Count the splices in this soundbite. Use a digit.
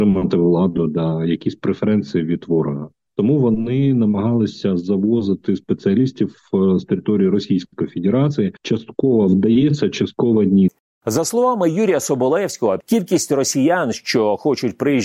2